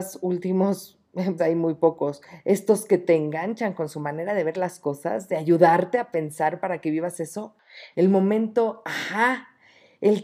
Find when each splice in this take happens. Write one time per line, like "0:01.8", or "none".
0:01.4
0:05.3
0:07.9